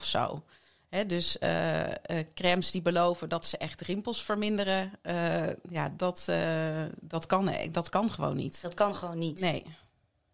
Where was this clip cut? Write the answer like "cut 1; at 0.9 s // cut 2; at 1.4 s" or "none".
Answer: none

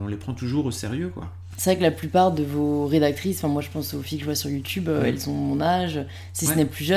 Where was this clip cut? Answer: cut 1; at 1.6 s

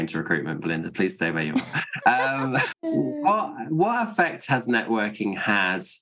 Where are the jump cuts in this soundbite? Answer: cut 1; at 2.7 s

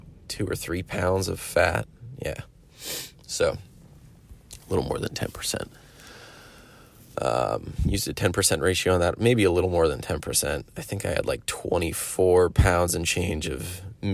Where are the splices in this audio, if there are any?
cut 1; at 7.1 s

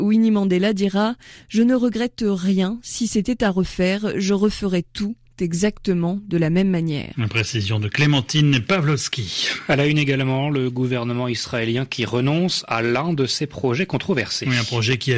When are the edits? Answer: none

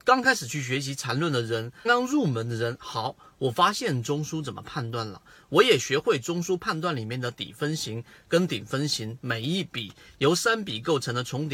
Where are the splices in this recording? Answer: cut 1; at 1.9 s

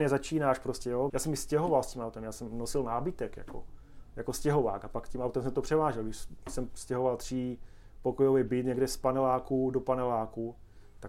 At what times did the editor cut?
cut 1; at 1.1 s

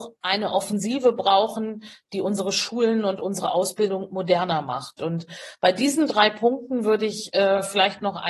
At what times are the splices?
none

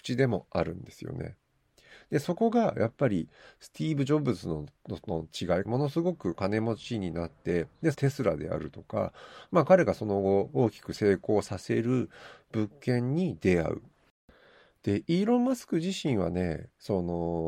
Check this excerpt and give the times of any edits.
cut 1; at 5.6 s // cut 2; at 7.9 s

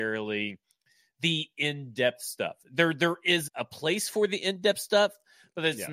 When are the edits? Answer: cut 1; at 3.5 s

